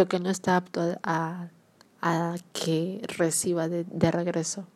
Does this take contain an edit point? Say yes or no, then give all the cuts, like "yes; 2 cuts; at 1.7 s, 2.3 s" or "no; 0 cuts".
no; 0 cuts